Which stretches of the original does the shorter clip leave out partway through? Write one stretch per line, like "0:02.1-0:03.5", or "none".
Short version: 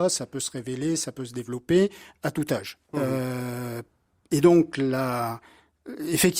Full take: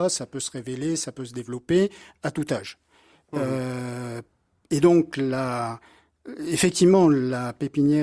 0:02.8-0:03.2

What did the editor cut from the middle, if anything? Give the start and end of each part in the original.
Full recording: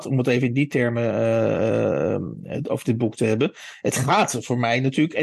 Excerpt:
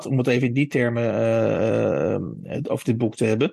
none

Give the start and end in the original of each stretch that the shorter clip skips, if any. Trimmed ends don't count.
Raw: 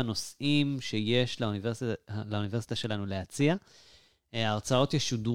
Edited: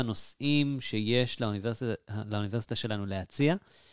none

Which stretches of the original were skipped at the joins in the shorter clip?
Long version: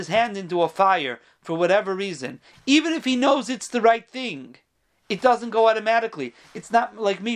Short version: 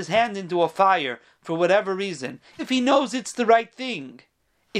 0:02.6-0:02.9

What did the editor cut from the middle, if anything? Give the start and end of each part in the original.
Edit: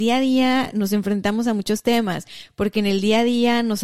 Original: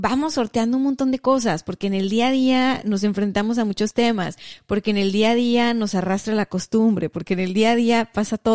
none

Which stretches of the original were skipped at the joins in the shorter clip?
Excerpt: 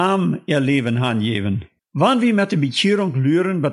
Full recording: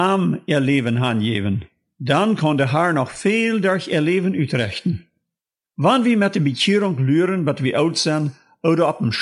0:01.8-0:05.6

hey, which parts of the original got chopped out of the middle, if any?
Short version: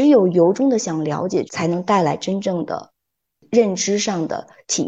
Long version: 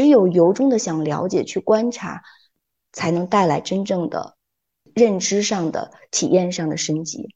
0:01.5-0:02.9

